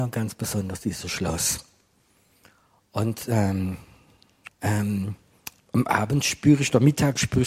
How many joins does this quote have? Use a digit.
2